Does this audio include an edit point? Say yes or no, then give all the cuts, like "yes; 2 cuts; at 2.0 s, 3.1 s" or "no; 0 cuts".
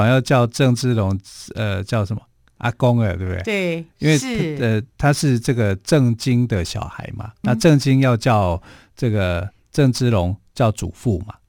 yes; 2 cuts; at 3.9 s, 7.4 s